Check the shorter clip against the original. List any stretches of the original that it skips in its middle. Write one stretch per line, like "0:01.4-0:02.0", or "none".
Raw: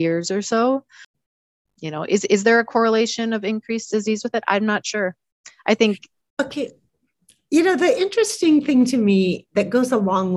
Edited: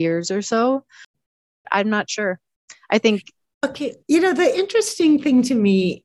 0:01.6-0:04.4
0:06.8-0:07.5

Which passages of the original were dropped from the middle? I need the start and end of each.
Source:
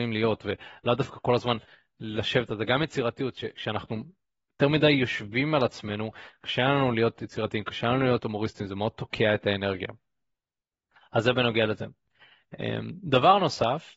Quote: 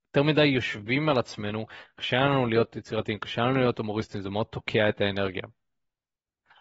none

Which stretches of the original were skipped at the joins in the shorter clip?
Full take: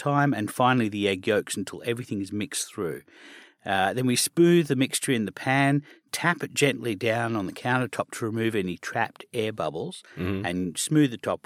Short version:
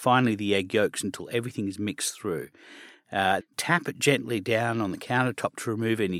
0:03.9-0:06.0

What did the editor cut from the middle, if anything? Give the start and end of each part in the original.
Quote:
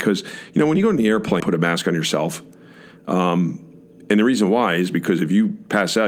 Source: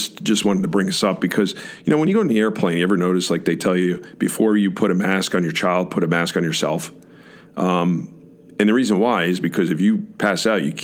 0:02.7-0:05.9

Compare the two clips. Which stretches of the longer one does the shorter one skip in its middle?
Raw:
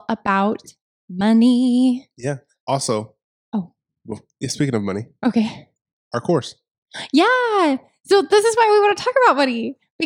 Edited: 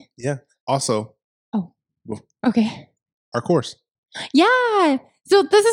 0:04.4-0:05.2

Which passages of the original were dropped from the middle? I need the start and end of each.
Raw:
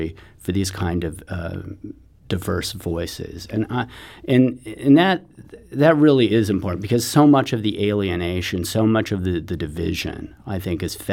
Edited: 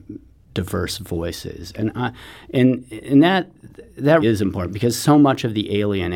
0:05.9-0:06.3

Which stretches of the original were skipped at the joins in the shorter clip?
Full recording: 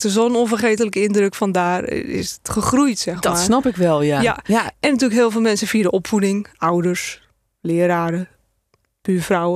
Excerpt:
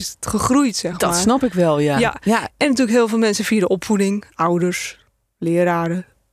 none

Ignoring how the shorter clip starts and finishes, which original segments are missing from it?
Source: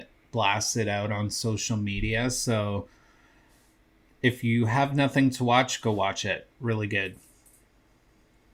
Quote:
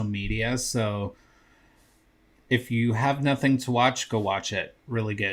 none

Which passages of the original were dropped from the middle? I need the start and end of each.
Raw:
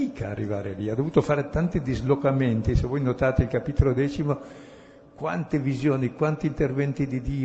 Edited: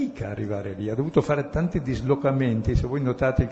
none

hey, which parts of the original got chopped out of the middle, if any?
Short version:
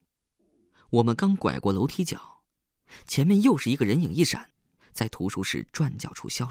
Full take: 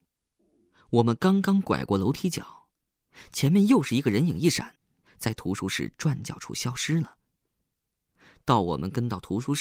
0:01.2-0:01.4

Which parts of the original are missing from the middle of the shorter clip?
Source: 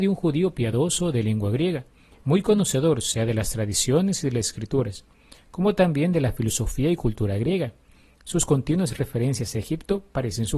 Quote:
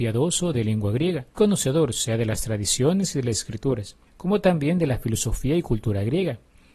0:01.9-0:02.4
0:05.1-0:05.4

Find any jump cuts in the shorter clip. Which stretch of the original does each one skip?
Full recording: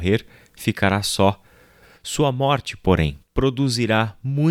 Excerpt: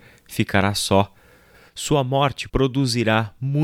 0:02.8-0:03.3

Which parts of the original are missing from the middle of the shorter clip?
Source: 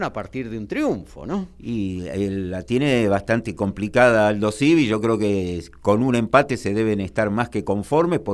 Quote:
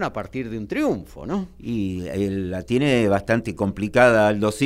none

